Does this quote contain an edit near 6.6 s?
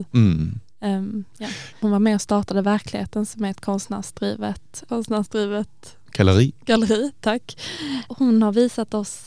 no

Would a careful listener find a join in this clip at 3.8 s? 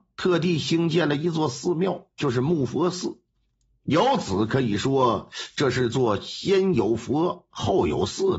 no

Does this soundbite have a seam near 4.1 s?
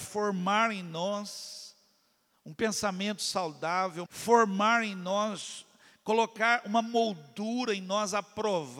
yes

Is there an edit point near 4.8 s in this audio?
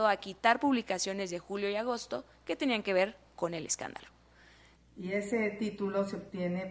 yes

